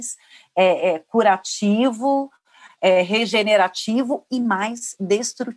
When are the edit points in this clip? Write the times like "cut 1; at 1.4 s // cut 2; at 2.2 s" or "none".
none